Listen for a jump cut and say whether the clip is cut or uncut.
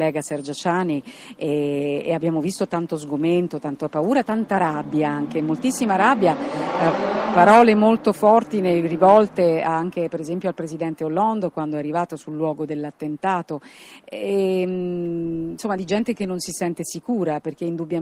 uncut